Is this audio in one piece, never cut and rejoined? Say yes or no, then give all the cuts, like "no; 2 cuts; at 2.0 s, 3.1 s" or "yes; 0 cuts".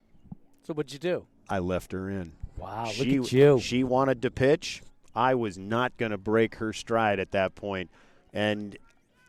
yes; 0 cuts